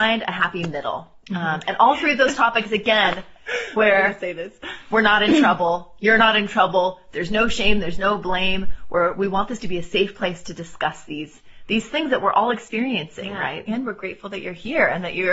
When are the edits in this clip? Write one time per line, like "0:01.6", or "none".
none